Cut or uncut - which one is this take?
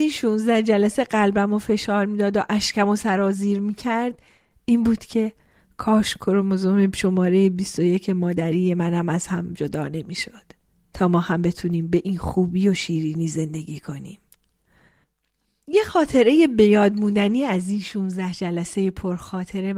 uncut